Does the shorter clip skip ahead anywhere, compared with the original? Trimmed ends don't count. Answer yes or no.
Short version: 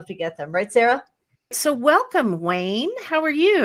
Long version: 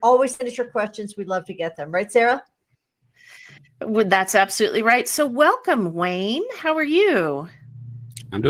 yes